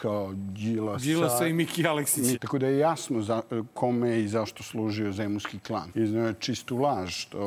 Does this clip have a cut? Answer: yes; 2 cuts; at 2.3 s, 5.9 s

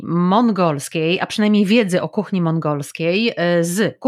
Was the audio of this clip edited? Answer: no; 0 cuts

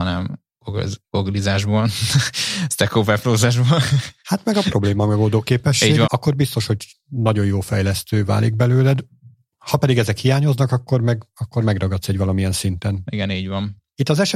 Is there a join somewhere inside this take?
yes; 1 cut; at 6.1 s

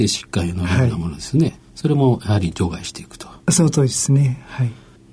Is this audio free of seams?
yes; 0 cuts

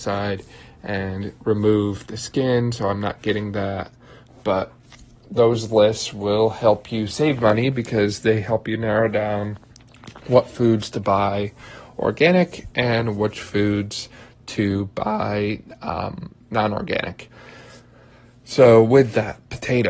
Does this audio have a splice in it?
no; 0 cuts

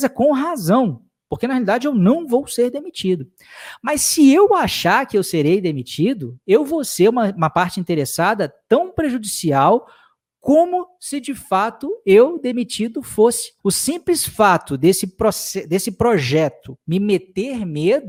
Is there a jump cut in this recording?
yes; 1 cut; at 13.6 s

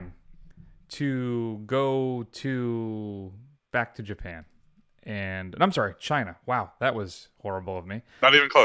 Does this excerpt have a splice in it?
no; 0 cuts

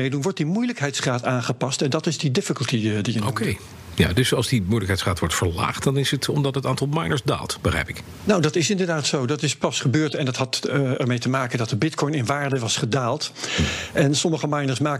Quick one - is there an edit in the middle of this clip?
no; 0 cuts

